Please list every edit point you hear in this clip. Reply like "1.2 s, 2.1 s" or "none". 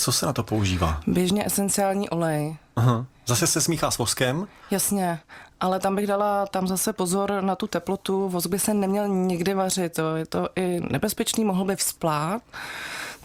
none